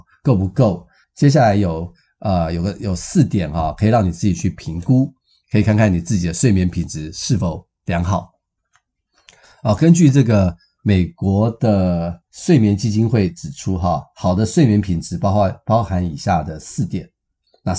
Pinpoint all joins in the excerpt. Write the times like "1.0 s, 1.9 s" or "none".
none